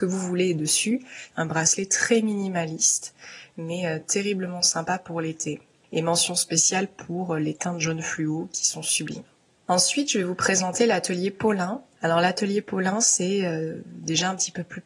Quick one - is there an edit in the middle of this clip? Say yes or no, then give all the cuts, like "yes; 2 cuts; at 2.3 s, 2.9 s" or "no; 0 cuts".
yes; 1 cut; at 1.3 s